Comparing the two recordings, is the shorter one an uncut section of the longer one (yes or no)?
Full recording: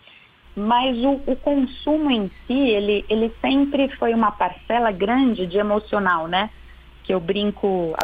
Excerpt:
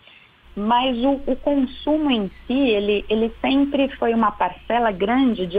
yes